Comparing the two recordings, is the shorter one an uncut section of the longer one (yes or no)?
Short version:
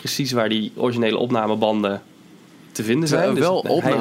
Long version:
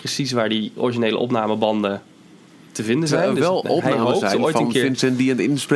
yes